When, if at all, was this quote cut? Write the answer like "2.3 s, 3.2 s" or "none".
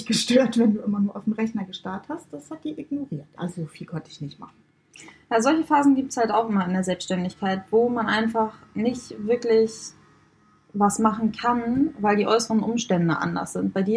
3.3 s